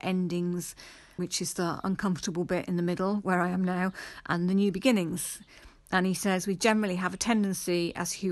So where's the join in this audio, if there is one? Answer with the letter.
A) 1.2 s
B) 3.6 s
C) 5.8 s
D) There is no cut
A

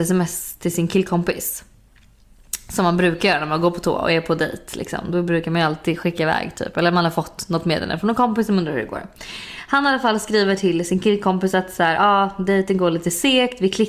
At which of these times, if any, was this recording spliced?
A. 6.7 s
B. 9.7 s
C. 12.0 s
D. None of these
D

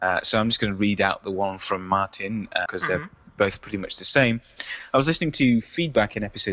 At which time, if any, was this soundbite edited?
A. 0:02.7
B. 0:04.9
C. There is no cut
A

